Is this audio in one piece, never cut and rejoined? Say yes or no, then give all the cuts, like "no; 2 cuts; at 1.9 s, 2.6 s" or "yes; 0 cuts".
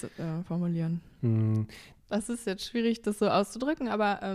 no; 1 cut; at 2.0 s